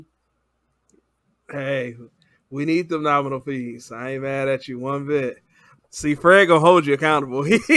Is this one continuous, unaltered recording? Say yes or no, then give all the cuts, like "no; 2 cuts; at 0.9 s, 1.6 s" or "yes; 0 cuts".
no; 1 cut; at 5.8 s